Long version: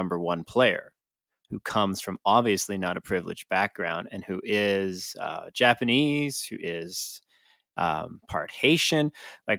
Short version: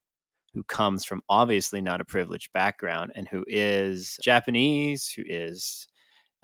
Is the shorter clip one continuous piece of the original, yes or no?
no